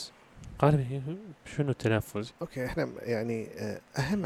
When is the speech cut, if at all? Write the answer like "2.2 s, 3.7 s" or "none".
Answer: 2.3 s